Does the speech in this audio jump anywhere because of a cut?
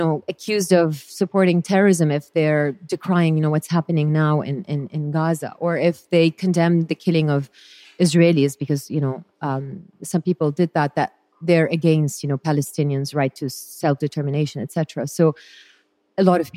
no; 0 cuts

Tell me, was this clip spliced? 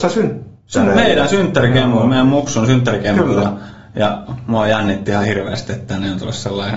no; 0 cuts

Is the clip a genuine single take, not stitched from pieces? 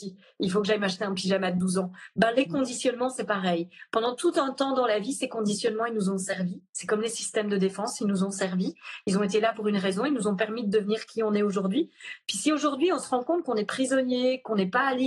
yes; 0 cuts

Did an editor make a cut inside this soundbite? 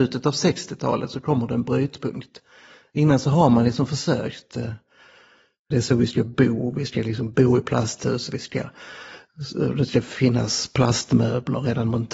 yes; 1 cut; at 5.7 s

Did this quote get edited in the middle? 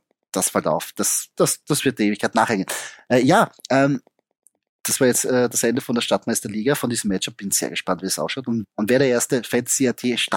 no; 0 cuts

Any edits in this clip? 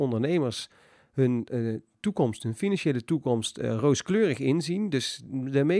no; 0 cuts

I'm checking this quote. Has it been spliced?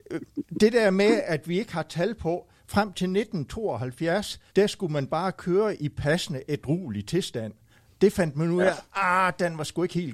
yes; 2 cuts; at 1.2 s, 4.5 s

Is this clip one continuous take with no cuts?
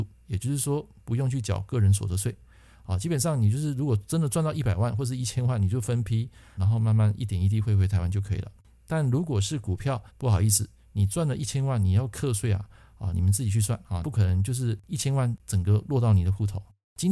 no; 3 cuts; at 6.6 s, 10.1 s, 14.0 s

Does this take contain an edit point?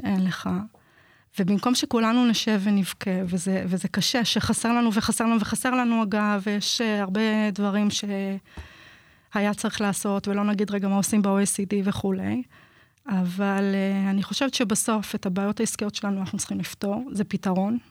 no; 0 cuts

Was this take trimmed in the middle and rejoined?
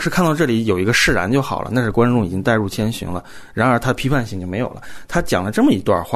no; 0 cuts

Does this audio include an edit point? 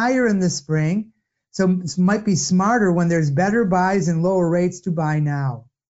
no; 0 cuts

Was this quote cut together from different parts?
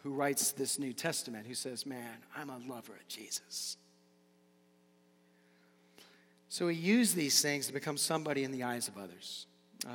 no; 0 cuts

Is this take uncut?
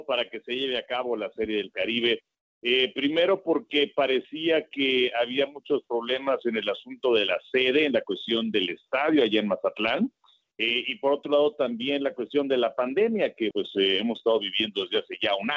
no; 2 cuts; at 10.4 s, 13.5 s

